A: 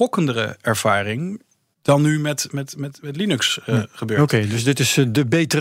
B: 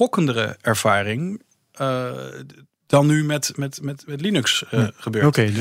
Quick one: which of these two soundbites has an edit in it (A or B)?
A